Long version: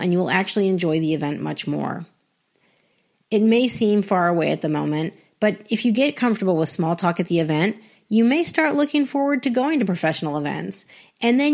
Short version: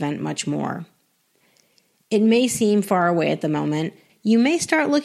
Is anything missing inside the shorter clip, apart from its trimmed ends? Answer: yes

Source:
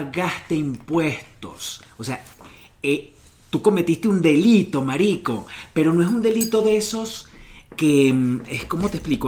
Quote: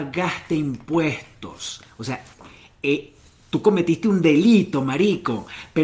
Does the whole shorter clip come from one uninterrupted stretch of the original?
yes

